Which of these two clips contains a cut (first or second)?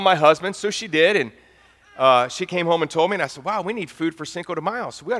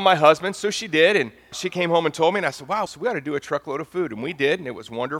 second